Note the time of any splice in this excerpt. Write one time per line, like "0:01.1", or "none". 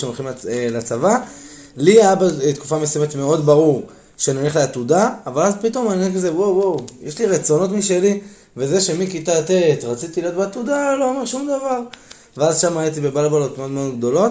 none